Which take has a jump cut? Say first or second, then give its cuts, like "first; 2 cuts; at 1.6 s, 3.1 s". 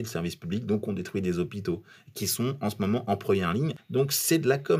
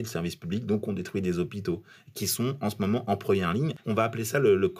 second; 1 cut; at 3.8 s